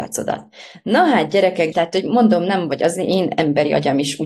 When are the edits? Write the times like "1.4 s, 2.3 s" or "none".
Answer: 1.7 s